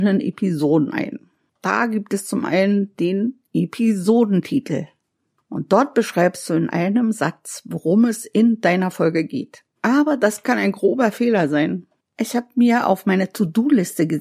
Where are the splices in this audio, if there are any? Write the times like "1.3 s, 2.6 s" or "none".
9.8 s

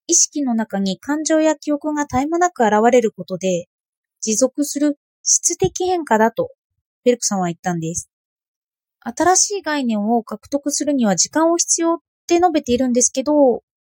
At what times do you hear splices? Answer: 8.9 s

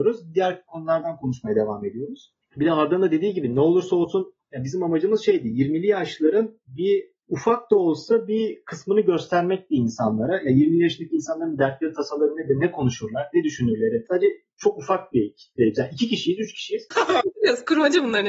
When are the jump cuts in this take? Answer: 7.2 s, 16.9 s

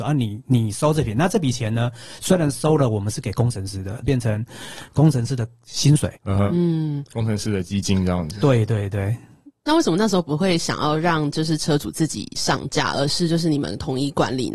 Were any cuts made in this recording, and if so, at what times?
4.0 s, 6.2 s

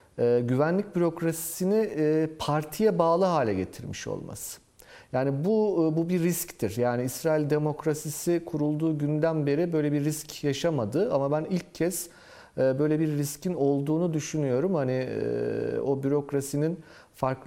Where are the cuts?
none

